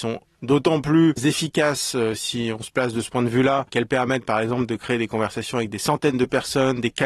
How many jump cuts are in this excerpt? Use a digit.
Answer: 1